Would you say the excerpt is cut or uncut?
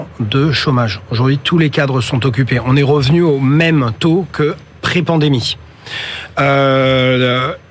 uncut